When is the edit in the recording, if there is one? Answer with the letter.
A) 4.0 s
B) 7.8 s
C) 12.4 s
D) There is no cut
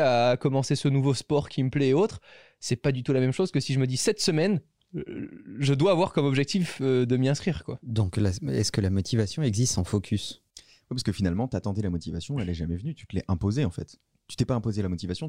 D